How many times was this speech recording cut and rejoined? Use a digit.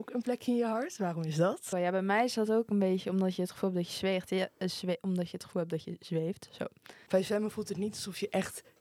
2